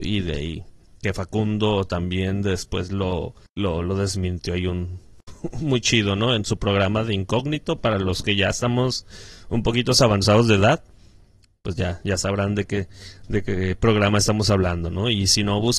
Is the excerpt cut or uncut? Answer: uncut